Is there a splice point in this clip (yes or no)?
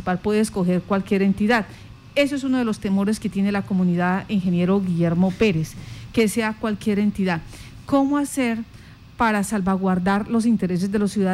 no